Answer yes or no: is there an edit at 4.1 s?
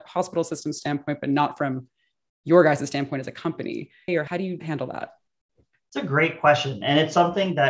yes